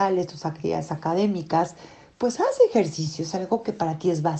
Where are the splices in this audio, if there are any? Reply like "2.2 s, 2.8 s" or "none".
none